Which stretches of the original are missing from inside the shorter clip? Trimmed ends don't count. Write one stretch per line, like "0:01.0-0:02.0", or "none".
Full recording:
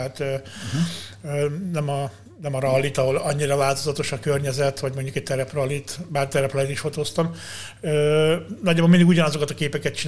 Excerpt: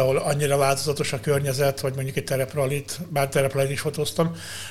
none